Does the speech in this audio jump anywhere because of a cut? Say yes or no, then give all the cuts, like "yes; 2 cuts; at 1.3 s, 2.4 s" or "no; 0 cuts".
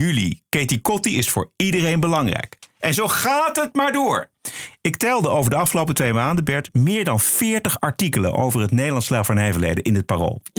no; 0 cuts